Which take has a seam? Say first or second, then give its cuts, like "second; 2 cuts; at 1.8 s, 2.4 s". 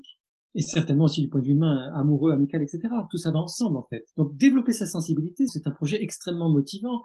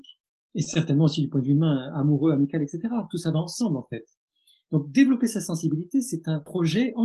first; 2 cuts; at 4.1 s, 5.5 s